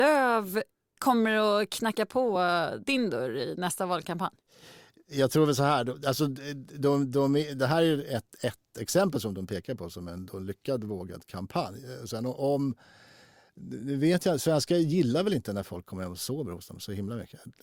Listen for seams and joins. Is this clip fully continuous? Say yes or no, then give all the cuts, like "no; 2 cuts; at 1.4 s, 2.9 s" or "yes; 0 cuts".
yes; 0 cuts